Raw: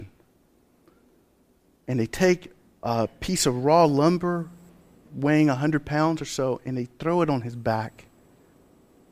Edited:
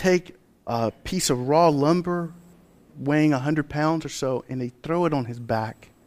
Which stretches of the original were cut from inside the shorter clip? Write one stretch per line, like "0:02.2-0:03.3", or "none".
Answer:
none